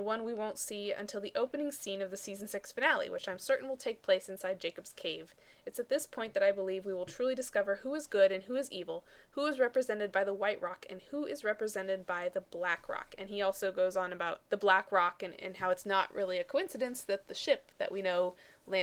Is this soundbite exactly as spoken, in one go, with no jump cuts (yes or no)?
no